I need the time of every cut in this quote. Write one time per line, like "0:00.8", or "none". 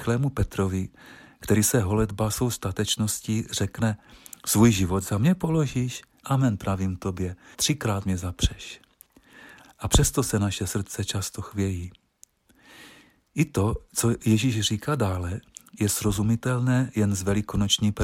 0:06.2
0:07.5
0:09.6